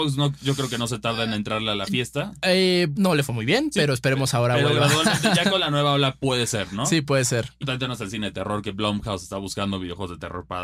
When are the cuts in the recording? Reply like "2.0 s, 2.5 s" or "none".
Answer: 3.0 s, 7.6 s